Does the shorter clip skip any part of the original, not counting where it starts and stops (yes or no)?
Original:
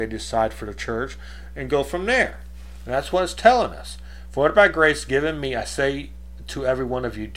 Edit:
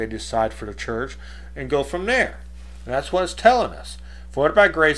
no